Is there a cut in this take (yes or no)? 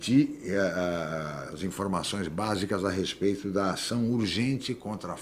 no